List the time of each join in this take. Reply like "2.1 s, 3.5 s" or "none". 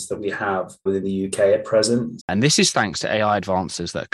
2.2 s